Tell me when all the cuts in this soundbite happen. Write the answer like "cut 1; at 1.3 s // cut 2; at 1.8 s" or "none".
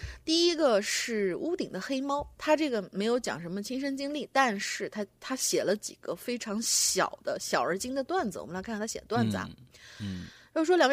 none